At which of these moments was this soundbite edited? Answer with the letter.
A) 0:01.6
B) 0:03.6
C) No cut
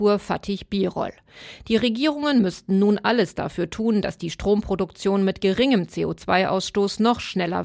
C